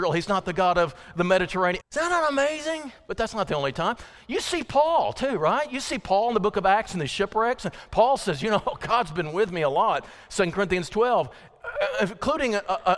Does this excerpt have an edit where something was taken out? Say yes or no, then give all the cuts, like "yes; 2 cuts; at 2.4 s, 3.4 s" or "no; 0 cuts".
yes; 1 cut; at 1.8 s